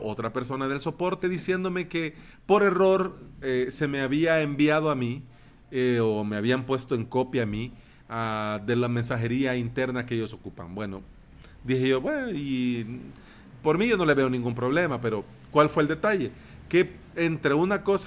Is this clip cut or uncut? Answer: uncut